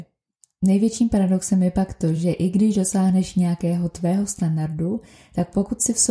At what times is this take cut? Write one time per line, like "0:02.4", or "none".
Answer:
none